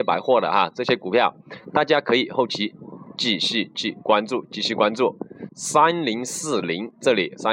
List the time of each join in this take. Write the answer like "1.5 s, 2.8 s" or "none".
5.5 s